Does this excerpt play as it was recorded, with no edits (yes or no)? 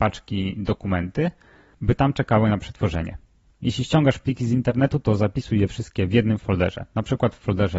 yes